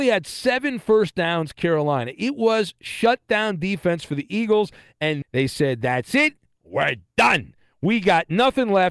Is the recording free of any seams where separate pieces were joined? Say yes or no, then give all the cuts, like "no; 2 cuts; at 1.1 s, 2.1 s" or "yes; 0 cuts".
no; 1 cut; at 5.2 s